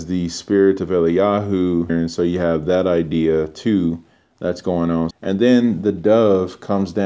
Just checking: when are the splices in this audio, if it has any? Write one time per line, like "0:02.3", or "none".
0:01.9
0:05.1